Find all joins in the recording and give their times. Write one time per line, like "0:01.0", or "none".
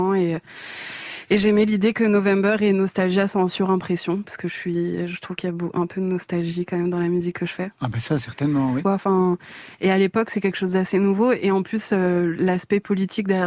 0:08.8